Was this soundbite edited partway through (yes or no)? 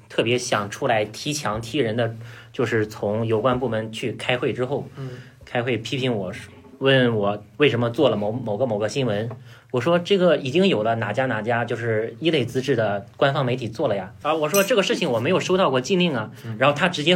no